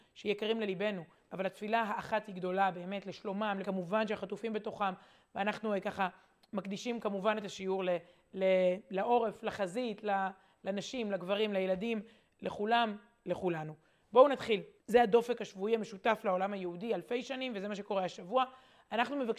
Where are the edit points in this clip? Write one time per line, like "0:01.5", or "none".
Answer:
0:03.6
0:14.8